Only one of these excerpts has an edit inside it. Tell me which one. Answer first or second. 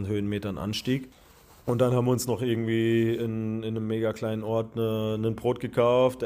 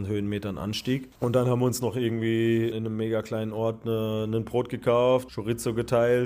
second